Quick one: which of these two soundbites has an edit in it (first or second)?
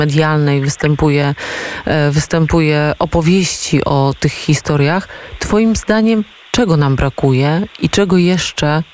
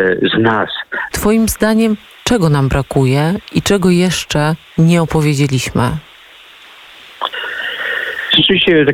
second